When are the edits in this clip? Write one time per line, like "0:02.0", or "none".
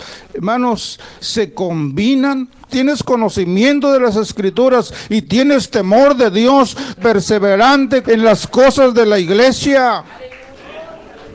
0:02.7
0:07.0
0:08.0